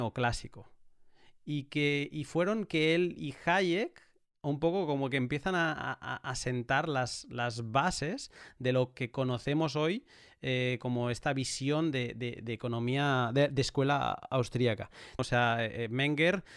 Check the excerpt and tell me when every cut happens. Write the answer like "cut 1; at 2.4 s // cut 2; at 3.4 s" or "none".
cut 1; at 15.2 s